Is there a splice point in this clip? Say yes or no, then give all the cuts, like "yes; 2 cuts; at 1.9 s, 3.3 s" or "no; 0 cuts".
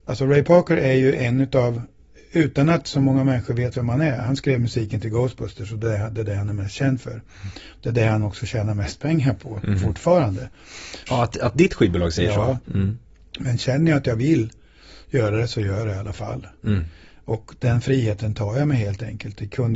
yes; 2 cuts; at 11.1 s, 12.6 s